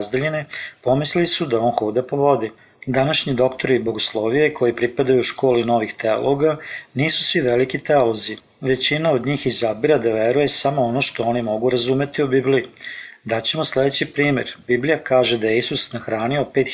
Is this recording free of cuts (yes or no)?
yes